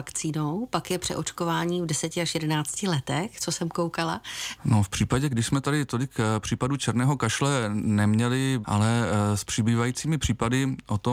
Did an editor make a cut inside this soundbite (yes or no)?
yes